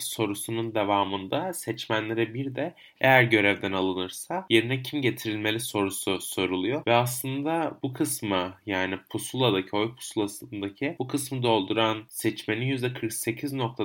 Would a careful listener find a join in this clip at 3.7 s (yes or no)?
no